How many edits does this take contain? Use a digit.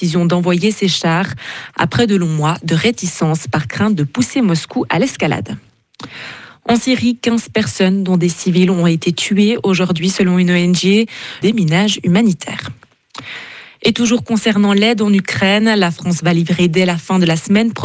1